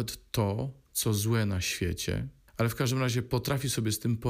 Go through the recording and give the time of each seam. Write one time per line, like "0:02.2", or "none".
0:02.5